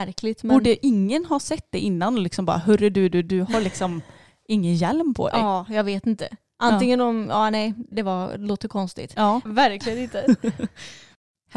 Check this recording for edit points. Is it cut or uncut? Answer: cut